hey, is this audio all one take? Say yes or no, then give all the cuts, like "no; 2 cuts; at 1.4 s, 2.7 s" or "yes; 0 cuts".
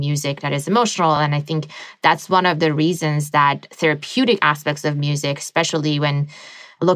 yes; 0 cuts